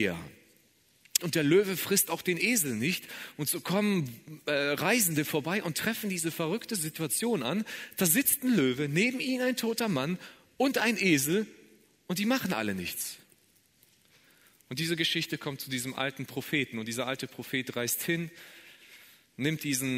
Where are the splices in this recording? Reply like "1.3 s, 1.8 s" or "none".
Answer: 1.2 s